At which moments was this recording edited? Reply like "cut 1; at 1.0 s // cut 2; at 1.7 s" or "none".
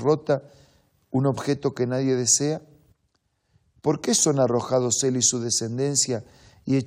none

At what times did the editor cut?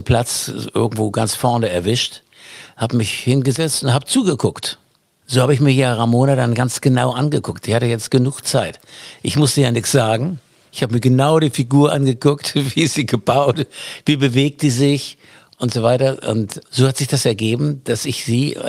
none

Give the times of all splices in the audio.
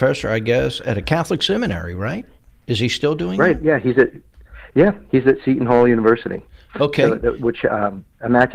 none

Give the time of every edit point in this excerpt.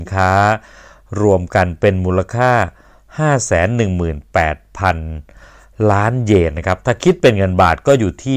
none

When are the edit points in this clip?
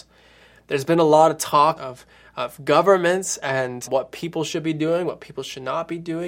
cut 1; at 1.8 s // cut 2; at 3.9 s

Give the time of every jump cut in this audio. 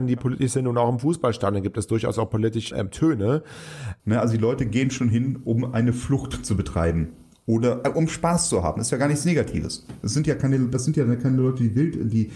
cut 1; at 2.7 s // cut 2; at 4.0 s

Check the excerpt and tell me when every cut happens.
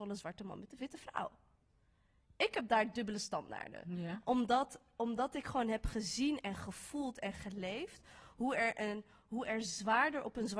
none

